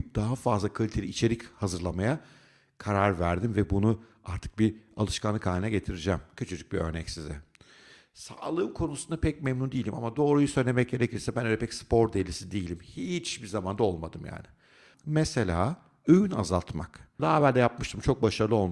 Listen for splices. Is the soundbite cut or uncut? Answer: cut